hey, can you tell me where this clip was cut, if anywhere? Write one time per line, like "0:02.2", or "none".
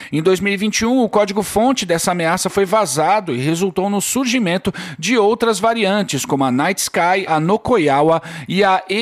0:07.3

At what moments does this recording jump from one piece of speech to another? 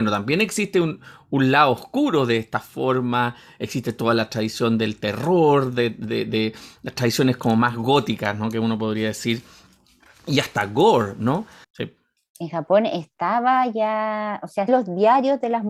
0:11.6
0:14.7

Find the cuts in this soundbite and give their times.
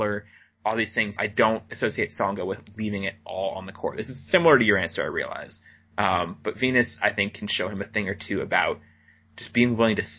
0:01.2

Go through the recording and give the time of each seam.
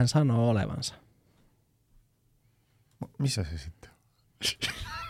none

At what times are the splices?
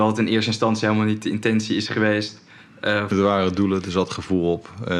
0:03.1

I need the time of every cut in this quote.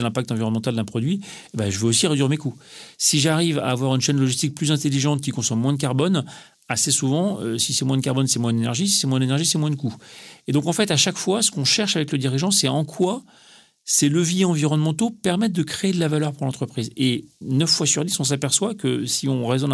none

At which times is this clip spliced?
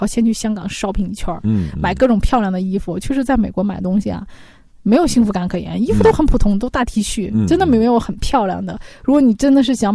none

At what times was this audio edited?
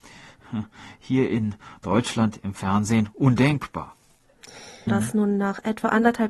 0:04.9

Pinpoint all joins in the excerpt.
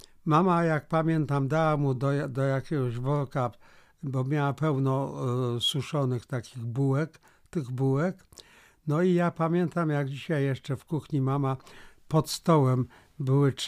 none

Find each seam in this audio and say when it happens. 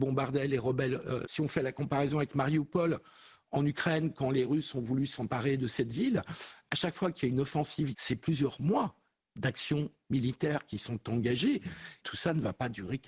0:01.2
0:07.9
0:12.0

